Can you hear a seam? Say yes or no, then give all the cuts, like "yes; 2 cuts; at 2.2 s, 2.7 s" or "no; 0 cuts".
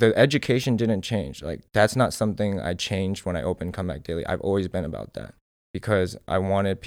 no; 0 cuts